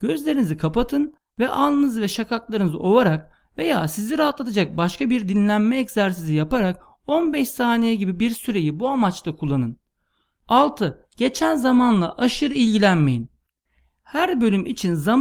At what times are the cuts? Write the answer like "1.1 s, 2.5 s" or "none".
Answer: none